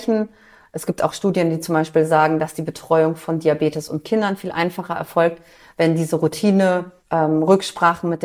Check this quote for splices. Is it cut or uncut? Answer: cut